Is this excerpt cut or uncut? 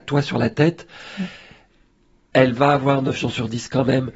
uncut